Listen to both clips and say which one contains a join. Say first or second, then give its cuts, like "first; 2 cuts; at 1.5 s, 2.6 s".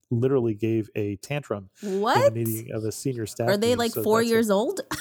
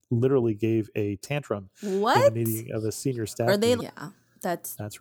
second; 1 cut; at 3.8 s